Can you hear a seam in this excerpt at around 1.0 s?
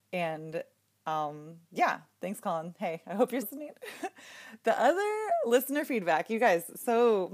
no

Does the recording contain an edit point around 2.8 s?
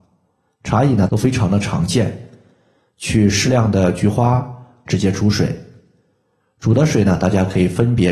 no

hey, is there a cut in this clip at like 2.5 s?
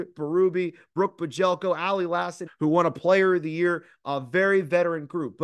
yes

